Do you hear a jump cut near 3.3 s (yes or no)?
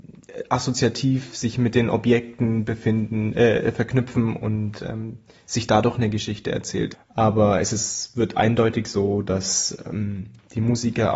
no